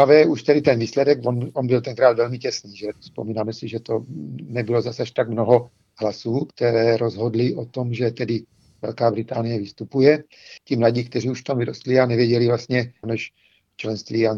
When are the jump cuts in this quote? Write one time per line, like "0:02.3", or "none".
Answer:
0:10.6
0:13.0